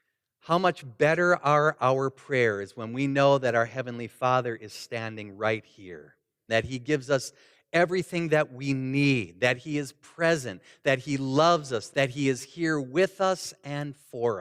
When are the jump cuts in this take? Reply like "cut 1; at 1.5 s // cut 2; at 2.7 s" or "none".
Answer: cut 1; at 6.5 s // cut 2; at 11.9 s